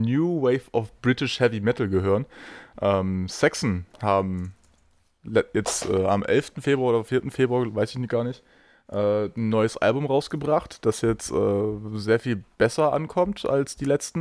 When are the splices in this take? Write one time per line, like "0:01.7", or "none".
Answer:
none